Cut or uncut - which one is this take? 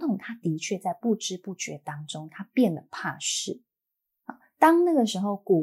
uncut